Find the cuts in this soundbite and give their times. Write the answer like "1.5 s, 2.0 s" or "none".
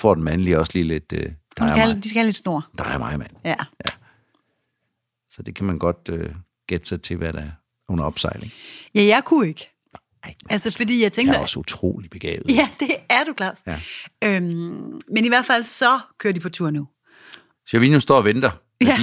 none